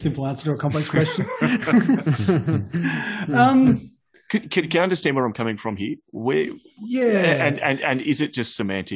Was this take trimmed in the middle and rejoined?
no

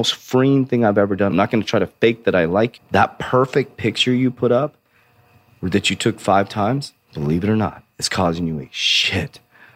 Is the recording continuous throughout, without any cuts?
no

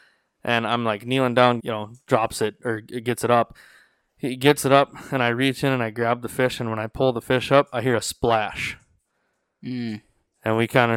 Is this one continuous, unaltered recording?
no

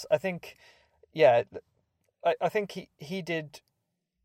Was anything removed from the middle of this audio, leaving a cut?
no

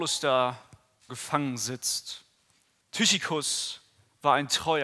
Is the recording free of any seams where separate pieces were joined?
no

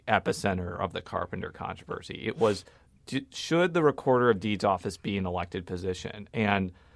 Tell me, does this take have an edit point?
no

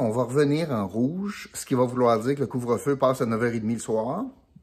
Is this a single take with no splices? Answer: yes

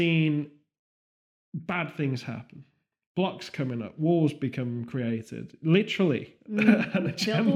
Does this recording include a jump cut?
no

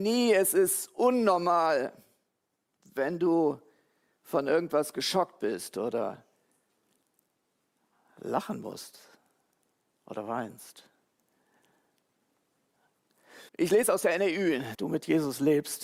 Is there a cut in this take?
yes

